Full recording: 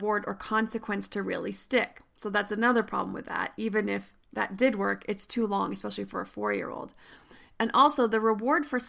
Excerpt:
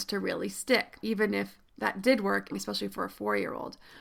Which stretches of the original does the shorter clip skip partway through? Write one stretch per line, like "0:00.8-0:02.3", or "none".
0:02.0-0:03.5
0:05.1-0:05.7